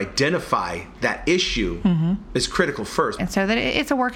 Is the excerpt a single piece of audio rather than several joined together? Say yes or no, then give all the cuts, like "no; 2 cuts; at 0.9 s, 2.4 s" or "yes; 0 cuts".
no; 1 cut; at 3.2 s